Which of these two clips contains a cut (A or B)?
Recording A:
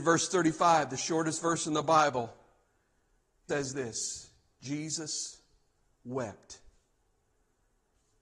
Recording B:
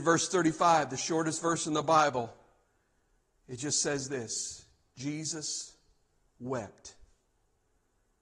A